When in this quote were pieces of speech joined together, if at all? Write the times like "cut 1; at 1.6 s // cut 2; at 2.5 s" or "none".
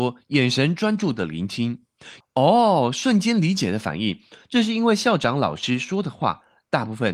cut 1; at 2.2 s